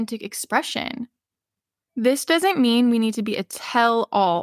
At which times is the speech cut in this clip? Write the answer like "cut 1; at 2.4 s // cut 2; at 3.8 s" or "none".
cut 1; at 1.8 s